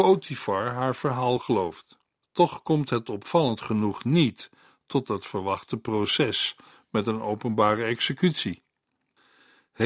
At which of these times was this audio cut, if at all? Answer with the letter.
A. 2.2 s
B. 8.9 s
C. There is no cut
A